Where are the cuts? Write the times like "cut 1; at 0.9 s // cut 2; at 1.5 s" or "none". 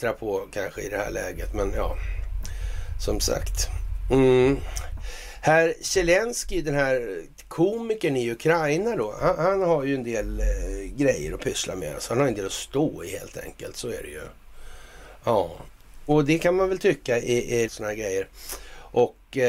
cut 1; at 16.1 s // cut 2; at 17.6 s